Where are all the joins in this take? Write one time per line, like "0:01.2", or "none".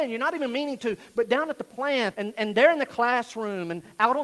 0:02.1